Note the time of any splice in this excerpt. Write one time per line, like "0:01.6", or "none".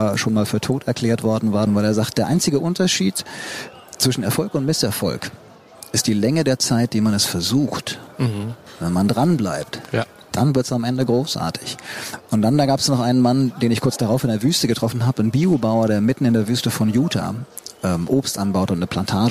0:01.7